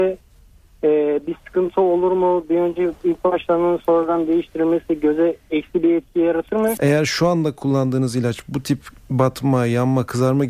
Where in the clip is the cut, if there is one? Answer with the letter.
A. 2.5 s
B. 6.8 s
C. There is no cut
B